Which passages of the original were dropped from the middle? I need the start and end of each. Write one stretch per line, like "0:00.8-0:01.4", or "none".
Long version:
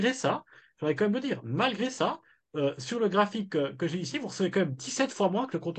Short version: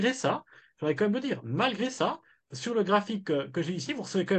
0:02.5-0:02.8